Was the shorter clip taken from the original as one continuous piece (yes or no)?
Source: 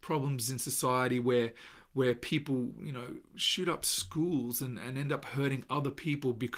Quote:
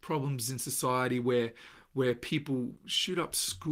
no